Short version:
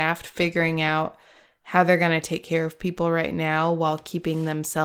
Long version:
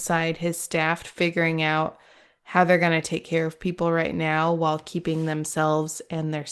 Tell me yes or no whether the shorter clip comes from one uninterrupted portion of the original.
yes